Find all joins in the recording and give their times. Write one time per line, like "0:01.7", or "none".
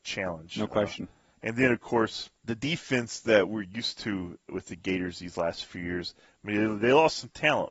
none